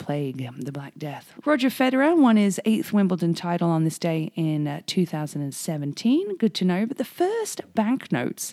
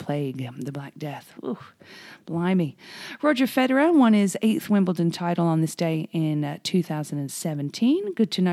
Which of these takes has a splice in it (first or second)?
first